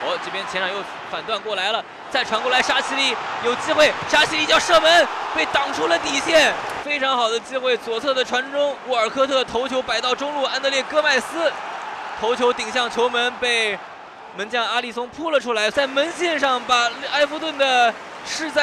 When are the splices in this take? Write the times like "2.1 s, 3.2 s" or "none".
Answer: 6.8 s, 15.7 s